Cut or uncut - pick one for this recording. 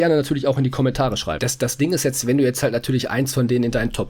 cut